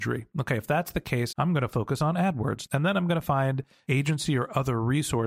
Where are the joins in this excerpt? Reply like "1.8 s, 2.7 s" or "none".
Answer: 1.3 s, 2.7 s